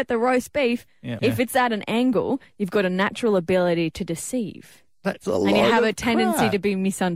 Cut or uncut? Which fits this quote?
cut